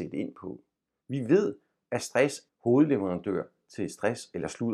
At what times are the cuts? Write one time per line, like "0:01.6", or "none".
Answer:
0:01.0
0:02.5